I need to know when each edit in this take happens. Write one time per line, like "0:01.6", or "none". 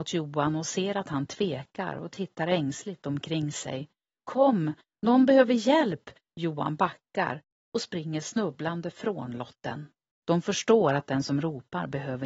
0:06.2
0:10.1